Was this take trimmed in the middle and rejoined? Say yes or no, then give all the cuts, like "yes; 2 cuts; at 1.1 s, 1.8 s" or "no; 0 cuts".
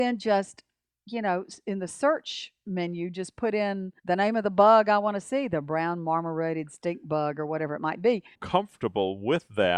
yes; 2 cuts; at 4.0 s, 8.3 s